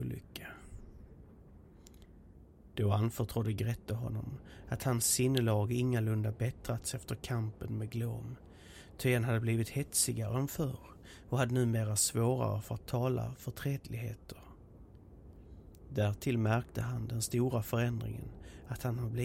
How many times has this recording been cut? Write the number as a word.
zero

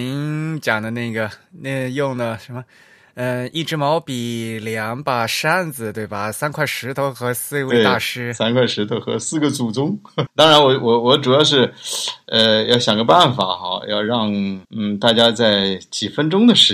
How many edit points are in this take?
two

